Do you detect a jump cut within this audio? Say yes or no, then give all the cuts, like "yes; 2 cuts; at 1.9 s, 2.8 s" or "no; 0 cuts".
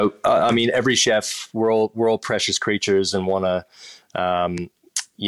no; 0 cuts